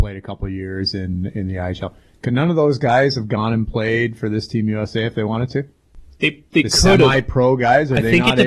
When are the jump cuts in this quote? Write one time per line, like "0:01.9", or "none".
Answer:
none